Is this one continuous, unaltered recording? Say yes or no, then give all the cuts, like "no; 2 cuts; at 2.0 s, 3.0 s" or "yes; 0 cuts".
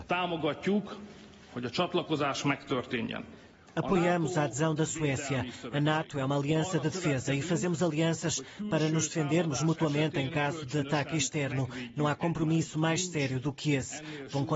yes; 0 cuts